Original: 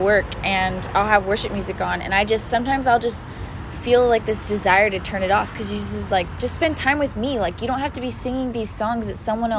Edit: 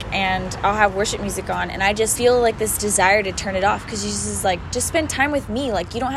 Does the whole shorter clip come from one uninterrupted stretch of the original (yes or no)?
no